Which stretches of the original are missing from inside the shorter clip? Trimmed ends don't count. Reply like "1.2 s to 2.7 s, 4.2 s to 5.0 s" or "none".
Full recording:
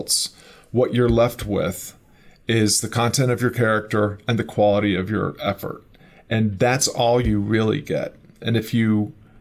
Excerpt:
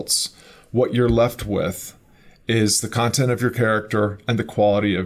none